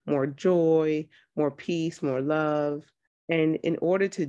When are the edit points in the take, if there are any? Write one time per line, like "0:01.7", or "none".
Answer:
none